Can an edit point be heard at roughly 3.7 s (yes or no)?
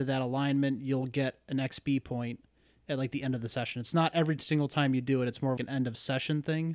no